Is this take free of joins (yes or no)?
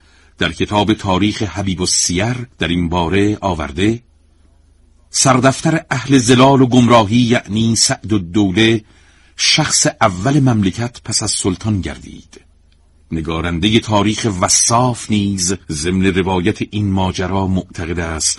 no